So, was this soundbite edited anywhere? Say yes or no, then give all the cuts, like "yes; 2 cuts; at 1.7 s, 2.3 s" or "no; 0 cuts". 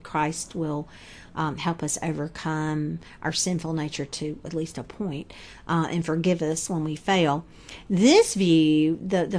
no; 0 cuts